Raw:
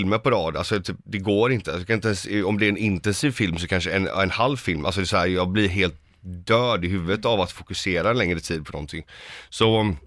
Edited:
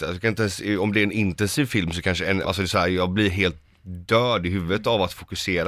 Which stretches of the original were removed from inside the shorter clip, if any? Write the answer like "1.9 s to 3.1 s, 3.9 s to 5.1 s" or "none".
4.1 s to 4.8 s